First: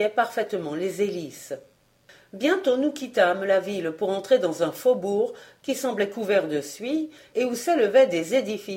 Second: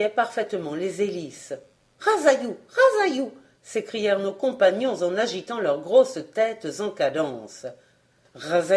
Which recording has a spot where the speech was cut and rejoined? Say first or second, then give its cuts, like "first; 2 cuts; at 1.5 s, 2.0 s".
second; 1 cut; at 1.9 s